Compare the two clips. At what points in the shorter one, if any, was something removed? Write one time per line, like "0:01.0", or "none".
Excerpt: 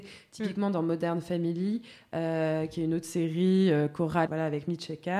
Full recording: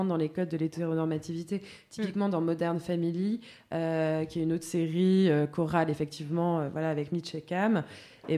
0:04.3